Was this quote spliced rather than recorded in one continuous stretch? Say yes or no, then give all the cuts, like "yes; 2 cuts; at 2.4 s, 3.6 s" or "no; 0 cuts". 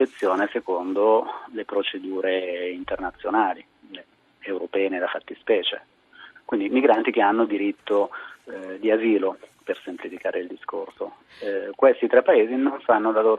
no; 0 cuts